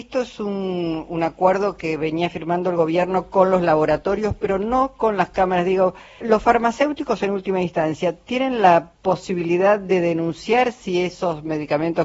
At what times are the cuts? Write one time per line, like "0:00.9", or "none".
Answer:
0:06.2